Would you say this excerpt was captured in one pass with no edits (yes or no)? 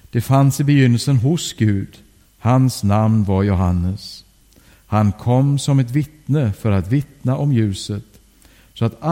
no